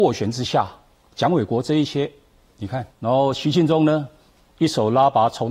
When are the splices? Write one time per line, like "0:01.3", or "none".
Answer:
0:02.9